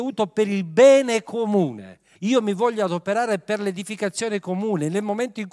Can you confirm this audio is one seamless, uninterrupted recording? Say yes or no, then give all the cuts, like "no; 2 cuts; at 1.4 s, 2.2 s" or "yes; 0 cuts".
no; 1 cut; at 2.1 s